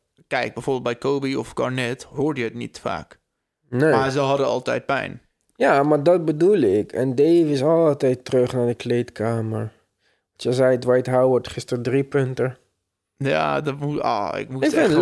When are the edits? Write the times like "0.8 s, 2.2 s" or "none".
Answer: none